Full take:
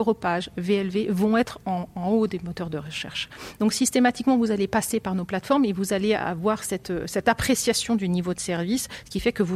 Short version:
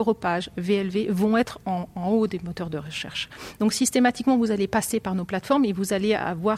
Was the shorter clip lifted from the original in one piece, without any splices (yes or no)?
yes